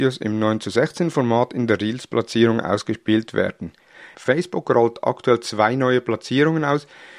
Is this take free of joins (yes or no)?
no